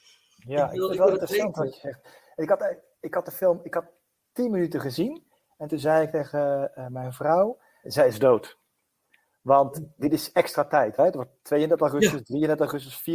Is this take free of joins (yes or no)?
no